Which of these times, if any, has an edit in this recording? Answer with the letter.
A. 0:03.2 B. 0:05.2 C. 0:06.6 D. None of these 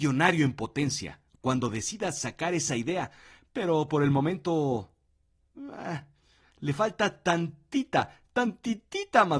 D